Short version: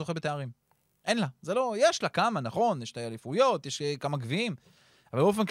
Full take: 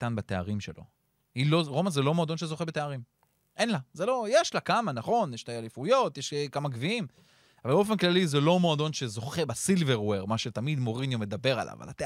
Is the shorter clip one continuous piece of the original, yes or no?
yes